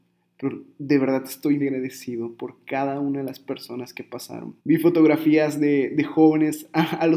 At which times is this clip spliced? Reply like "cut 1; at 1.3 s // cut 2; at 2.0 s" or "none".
cut 1; at 1.6 s // cut 2; at 4.6 s